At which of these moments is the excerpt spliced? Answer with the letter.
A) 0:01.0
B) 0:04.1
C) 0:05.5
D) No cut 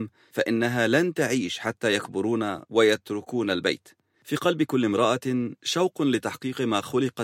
B